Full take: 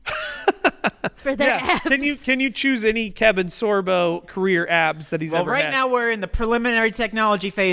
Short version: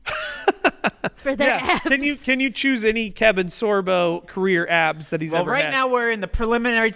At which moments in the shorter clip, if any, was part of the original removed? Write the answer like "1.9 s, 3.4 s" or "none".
none

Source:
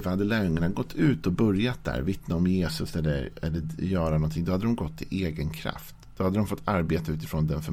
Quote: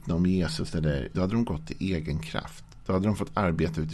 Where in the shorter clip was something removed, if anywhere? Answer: 1.1 s

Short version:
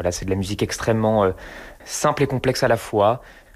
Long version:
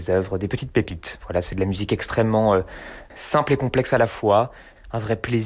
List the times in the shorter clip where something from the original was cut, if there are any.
none

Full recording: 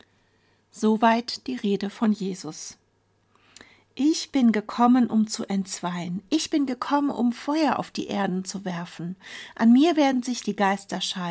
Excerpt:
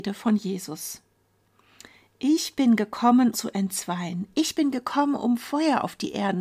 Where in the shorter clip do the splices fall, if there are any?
3.3 s

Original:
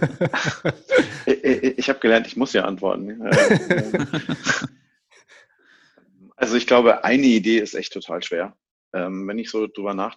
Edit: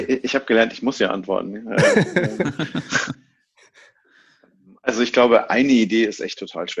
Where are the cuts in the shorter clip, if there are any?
none

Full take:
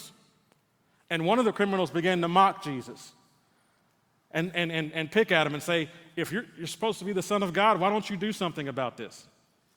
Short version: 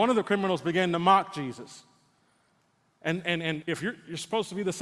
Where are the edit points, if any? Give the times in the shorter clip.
3.6 s

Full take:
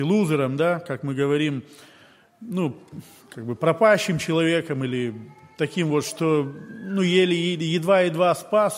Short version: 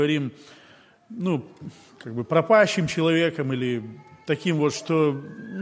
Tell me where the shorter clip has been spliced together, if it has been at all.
none

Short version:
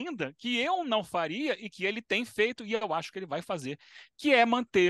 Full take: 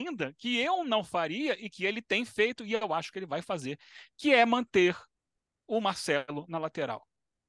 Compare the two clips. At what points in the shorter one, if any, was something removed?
none

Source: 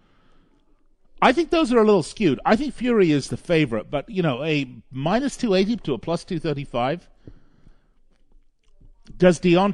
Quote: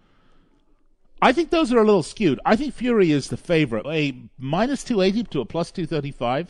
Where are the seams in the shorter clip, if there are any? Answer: 3.8 s

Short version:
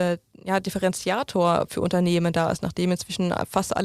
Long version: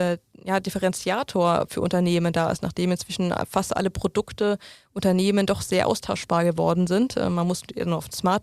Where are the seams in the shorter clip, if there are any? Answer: none

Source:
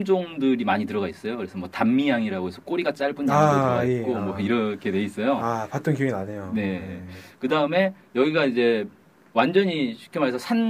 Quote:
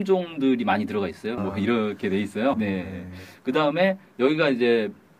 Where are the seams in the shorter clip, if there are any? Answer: 1.4 s, 2.5 s

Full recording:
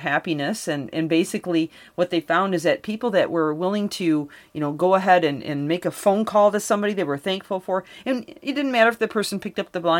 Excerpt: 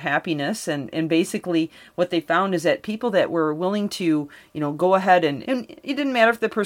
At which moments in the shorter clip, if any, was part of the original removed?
5.4 s

